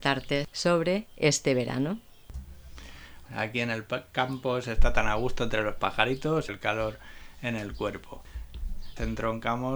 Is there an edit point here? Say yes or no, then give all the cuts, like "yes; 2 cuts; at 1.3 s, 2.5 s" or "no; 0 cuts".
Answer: yes; 2 cuts; at 3.3 s, 6.5 s